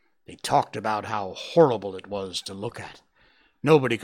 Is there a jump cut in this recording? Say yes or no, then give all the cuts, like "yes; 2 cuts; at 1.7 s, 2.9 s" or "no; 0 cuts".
no; 0 cuts